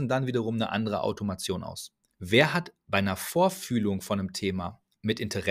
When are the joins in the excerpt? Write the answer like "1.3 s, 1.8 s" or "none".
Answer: 2.1 s